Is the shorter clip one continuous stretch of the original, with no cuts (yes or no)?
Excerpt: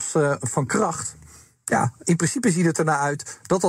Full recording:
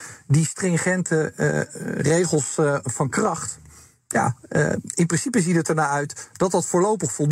no